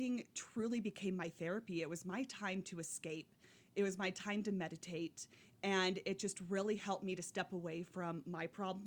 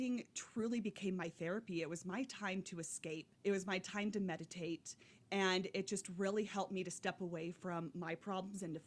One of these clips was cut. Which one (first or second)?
second